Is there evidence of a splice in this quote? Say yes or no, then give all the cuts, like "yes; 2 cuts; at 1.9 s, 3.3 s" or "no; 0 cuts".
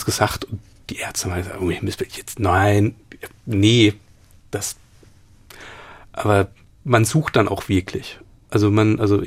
no; 0 cuts